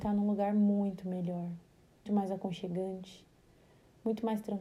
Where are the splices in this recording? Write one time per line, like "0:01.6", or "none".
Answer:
0:02.1

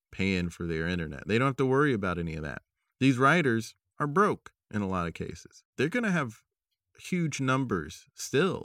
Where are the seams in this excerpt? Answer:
0:05.7

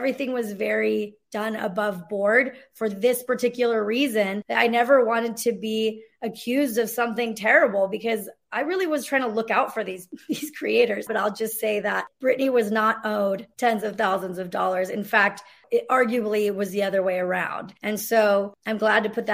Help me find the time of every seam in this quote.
0:11.1

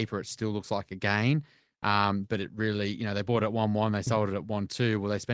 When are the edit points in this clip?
none

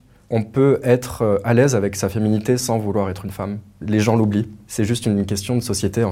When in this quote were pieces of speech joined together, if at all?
none

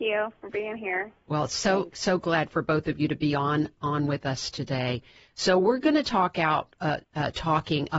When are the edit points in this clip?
0:07.0

